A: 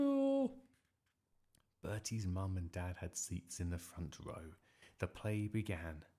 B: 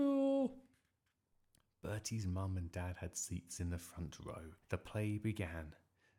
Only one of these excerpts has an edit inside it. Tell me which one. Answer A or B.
B